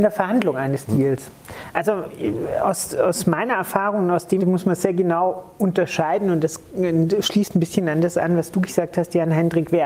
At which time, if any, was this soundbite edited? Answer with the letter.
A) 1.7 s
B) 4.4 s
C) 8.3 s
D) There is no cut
B